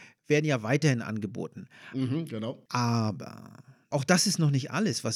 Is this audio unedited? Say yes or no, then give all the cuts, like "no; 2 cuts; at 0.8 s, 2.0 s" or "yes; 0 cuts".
yes; 0 cuts